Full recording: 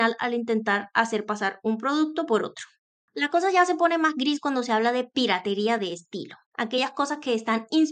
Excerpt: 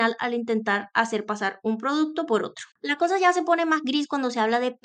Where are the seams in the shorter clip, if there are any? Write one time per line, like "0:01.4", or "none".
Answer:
0:02.7